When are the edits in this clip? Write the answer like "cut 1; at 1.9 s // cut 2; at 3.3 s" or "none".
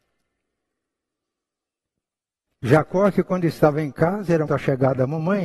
cut 1; at 2.5 s // cut 2; at 4.5 s